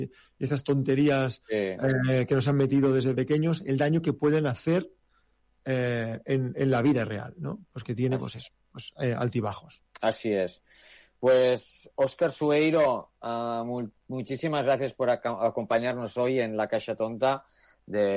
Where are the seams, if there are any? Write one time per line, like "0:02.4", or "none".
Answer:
0:03.1
0:09.9